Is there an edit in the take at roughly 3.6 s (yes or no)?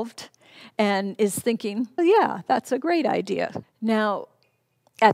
yes